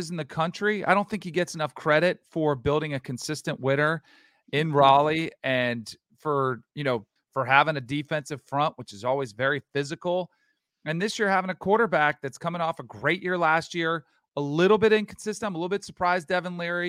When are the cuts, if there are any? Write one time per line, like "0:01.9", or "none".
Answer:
0:07.2